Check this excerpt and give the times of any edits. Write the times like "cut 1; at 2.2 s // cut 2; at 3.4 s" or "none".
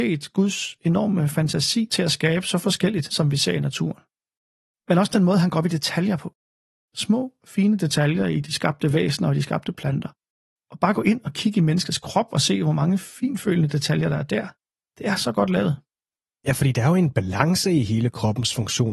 none